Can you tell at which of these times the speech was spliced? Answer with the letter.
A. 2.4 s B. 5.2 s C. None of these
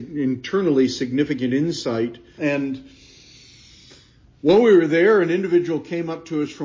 A